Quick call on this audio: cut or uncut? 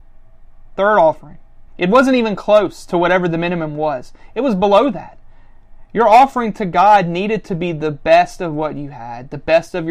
cut